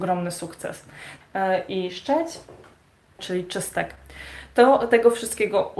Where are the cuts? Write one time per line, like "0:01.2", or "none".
0:01.2
0:03.2

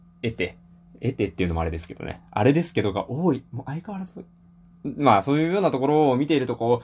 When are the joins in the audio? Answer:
none

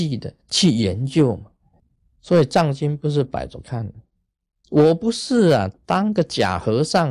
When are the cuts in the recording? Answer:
0:04.6

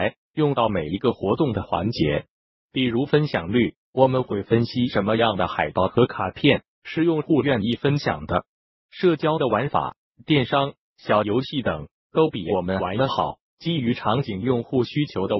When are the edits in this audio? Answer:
none

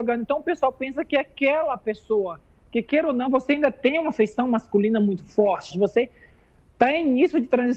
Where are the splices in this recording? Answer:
0:03.3
0:05.7

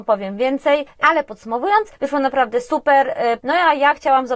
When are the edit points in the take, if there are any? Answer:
0:01.0
0:03.4

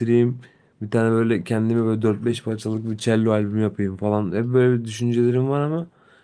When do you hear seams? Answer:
none

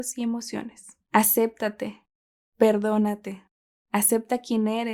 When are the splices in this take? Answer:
0:01.0

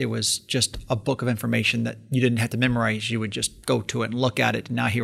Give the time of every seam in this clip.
none

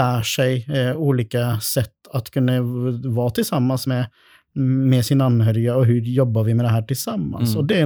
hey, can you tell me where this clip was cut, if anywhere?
none

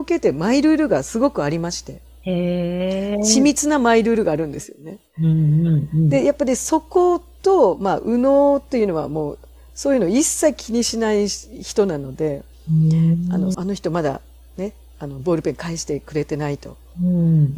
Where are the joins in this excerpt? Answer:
0:13.5

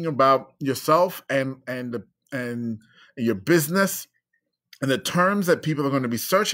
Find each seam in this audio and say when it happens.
none

